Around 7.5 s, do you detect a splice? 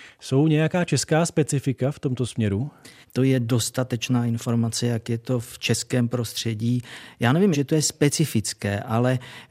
yes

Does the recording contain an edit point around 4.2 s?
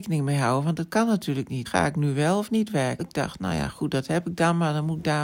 no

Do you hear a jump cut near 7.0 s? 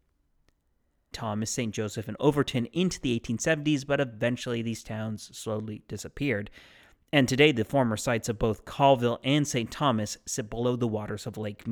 no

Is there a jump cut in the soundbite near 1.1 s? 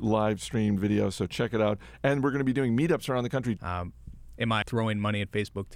no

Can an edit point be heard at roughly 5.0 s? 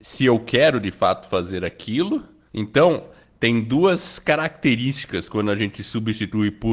no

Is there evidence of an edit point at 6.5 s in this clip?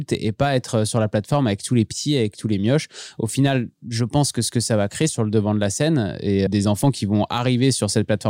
yes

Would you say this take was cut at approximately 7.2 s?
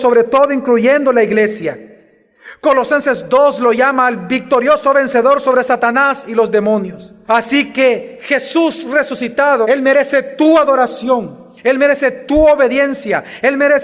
yes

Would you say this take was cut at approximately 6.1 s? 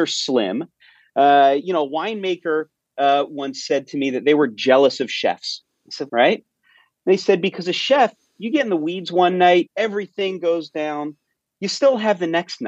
yes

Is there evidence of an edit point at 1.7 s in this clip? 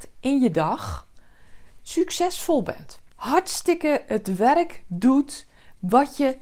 no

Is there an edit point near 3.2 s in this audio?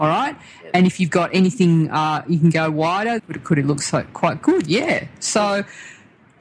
yes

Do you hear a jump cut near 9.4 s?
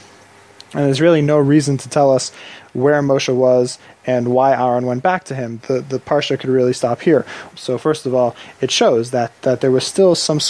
yes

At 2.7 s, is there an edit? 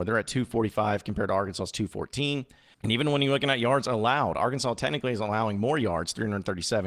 yes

